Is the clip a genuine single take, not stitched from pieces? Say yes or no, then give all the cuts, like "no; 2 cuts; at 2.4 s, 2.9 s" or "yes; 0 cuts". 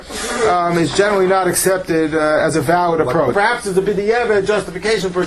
no; 1 cut; at 3.3 s